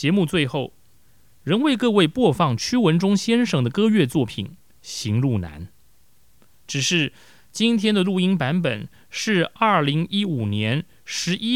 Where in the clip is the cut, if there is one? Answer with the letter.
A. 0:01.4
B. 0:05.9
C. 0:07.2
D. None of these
D